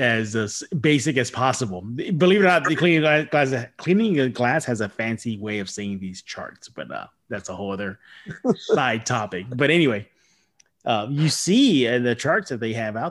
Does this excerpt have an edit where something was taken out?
no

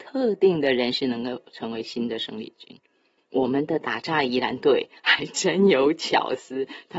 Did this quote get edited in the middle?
yes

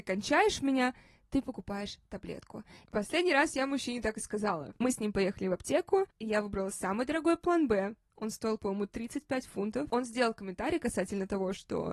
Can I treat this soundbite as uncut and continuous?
yes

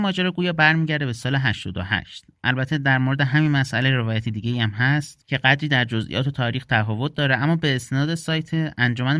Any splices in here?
no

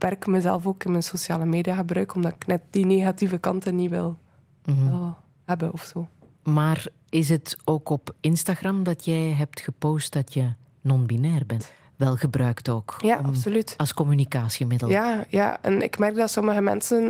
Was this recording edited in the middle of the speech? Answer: yes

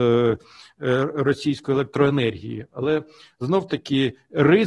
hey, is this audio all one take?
yes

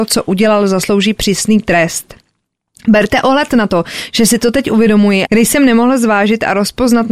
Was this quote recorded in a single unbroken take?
no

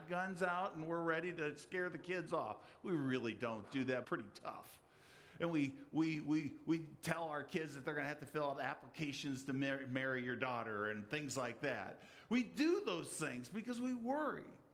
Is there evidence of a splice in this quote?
yes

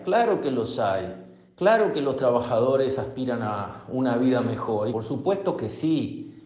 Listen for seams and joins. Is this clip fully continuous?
no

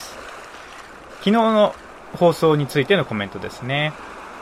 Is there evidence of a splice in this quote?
yes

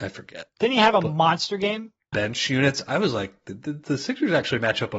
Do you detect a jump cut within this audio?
yes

